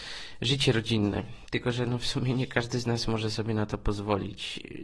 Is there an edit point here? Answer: no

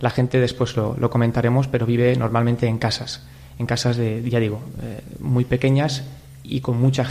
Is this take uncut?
yes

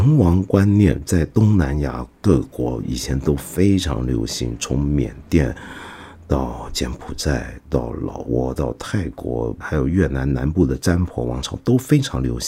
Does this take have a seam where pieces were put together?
yes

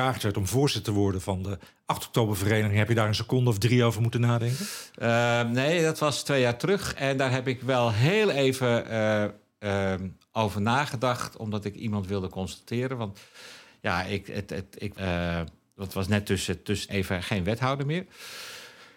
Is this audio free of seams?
no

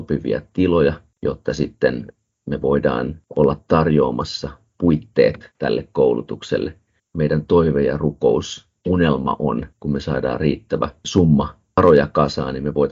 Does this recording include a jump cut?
yes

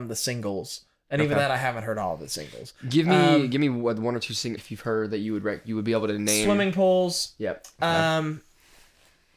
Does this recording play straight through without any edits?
no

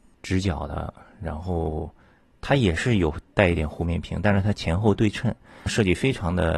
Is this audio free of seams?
no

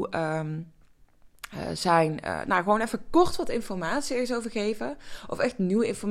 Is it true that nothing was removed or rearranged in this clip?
yes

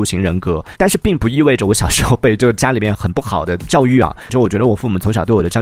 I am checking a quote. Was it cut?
yes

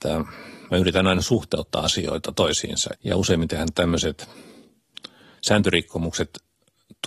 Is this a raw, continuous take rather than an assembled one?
no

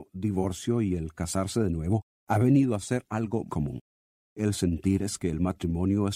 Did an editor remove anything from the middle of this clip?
yes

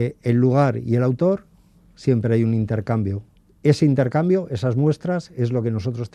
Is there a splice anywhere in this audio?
no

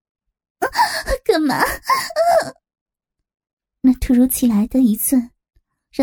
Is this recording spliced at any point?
no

